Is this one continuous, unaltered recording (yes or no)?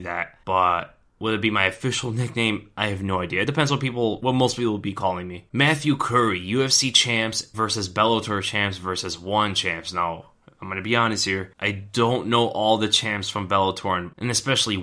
yes